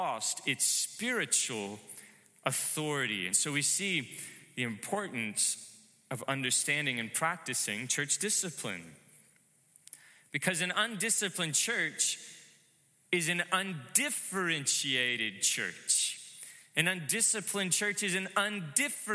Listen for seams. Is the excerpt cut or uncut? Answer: uncut